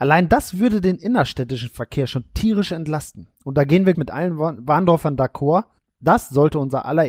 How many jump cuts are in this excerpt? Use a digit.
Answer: 1